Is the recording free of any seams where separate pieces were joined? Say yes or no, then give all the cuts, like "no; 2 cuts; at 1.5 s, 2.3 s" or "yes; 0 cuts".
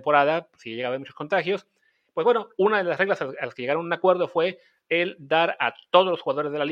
yes; 0 cuts